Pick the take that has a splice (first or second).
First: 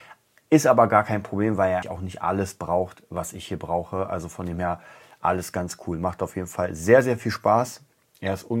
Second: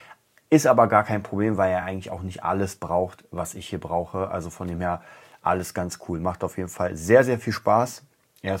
first